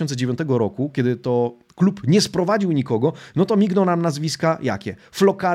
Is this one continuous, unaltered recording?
yes; 0 cuts

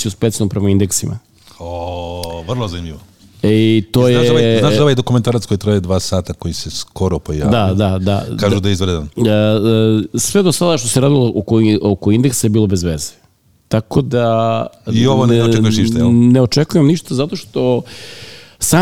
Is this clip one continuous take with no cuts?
yes; 0 cuts

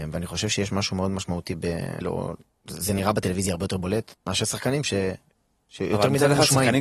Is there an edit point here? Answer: yes; 2 cuts; at 2.0 s, 4.1 s

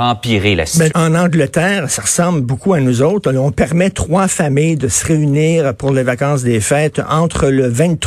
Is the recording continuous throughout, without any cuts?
no; 1 cut; at 0.9 s

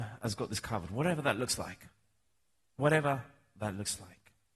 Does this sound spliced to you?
no; 0 cuts

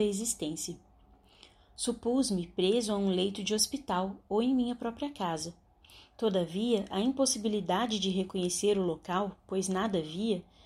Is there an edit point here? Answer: no; 0 cuts

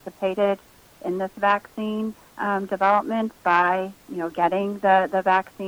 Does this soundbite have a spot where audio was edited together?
yes; 1 cut; at 4.1 s

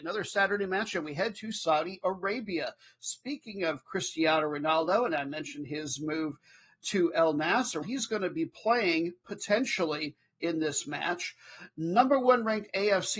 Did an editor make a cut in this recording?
yes; 1 cut; at 7.8 s

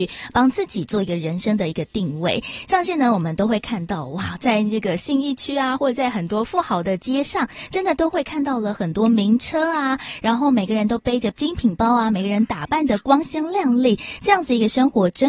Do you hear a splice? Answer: no; 0 cuts

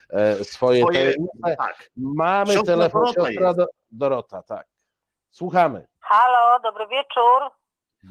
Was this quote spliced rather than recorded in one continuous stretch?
yes; 1 cut; at 6.0 s

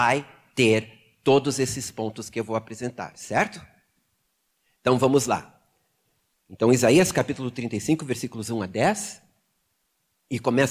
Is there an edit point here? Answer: no; 0 cuts

